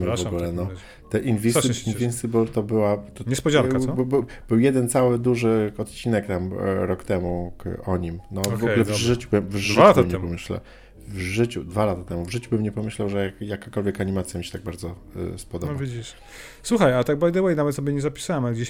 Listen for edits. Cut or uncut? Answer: uncut